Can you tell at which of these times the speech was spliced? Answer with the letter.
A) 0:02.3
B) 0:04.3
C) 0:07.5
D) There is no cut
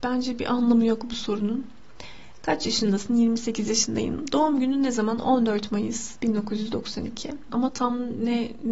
C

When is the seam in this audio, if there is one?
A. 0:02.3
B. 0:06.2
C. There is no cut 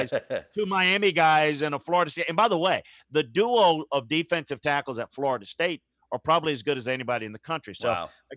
C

